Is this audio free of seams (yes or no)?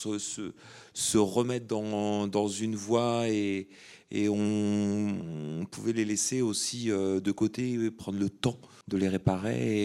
no